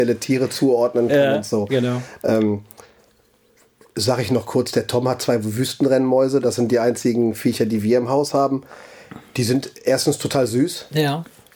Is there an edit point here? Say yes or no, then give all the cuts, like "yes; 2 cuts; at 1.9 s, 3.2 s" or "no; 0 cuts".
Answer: no; 0 cuts